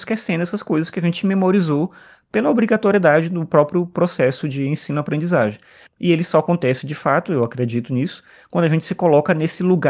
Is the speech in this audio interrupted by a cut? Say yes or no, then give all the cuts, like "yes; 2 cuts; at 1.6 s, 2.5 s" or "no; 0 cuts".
yes; 1 cut; at 5.9 s